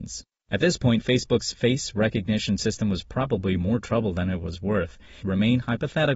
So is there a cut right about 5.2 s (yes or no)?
yes